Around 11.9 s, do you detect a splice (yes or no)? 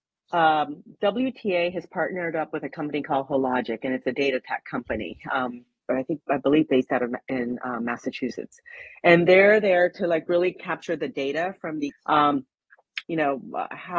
yes